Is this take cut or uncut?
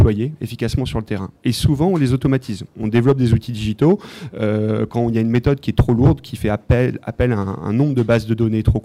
uncut